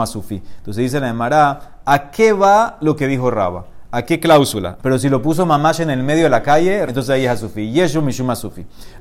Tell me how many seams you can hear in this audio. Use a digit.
2